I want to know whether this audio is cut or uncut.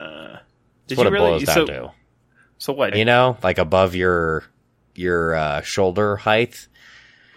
cut